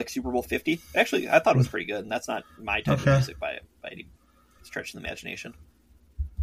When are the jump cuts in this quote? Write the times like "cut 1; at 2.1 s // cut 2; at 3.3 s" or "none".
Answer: none